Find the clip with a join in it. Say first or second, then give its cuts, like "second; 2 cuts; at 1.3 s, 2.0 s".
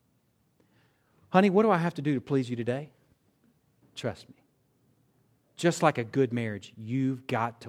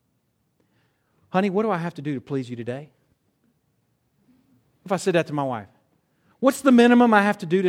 first; 1 cut; at 3.8 s